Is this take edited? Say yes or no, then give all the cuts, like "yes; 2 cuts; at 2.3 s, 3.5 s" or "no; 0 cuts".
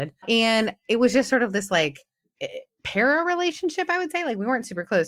no; 0 cuts